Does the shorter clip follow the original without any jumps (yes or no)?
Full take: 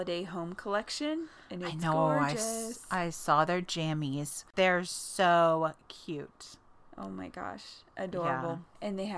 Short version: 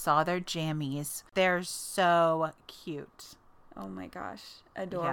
yes